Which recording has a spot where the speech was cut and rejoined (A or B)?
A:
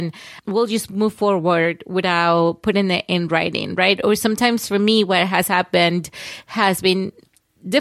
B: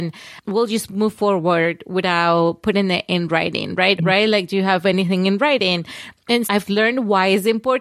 B